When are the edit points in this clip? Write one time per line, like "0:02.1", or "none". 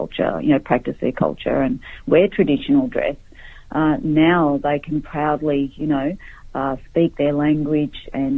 none